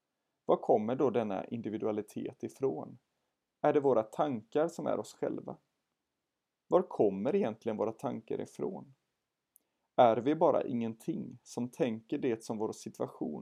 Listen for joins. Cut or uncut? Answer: cut